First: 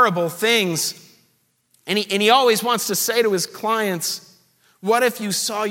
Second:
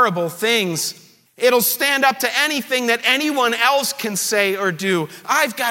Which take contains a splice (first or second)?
second